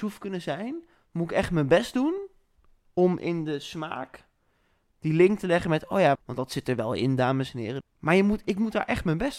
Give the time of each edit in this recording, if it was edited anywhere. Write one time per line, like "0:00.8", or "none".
0:06.2
0:07.8

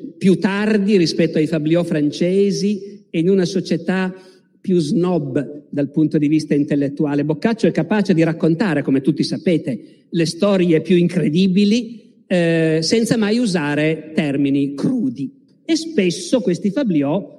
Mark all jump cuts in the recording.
0:15.5

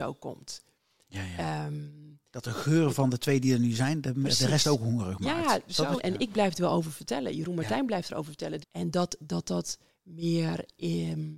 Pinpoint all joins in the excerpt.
0:06.0
0:08.6

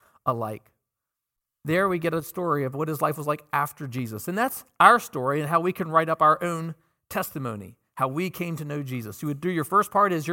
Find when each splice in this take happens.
none

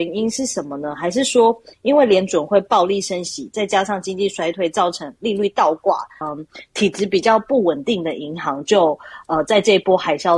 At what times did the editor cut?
0:06.2

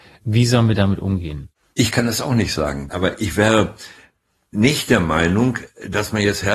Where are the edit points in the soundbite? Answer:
0:02.9

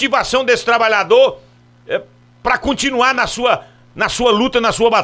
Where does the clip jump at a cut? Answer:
none

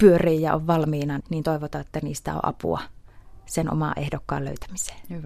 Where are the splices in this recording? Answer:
0:01.2

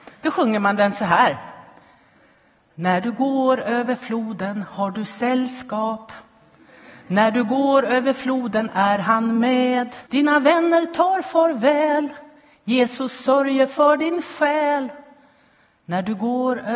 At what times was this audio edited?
0:10.1

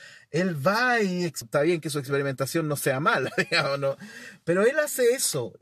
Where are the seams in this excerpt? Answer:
0:01.4

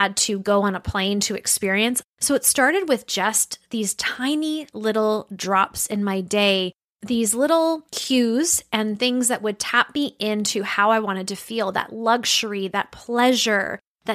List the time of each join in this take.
0:02.0

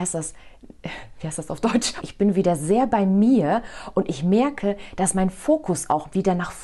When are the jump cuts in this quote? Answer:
0:02.0

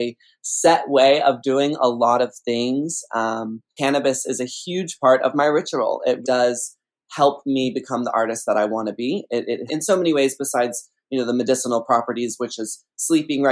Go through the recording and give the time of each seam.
0:03.8
0:06.2
0:09.7

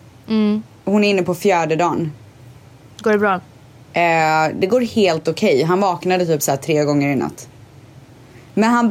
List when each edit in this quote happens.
none

